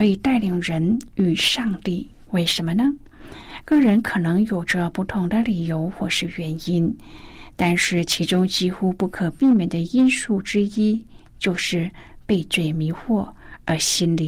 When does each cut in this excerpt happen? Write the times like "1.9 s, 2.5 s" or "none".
2.3 s